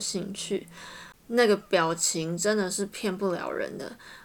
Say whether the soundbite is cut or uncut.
cut